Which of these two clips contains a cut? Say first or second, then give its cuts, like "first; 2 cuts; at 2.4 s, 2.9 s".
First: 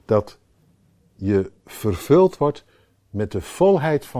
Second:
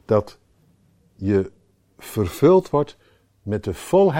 first; 1 cut; at 1.6 s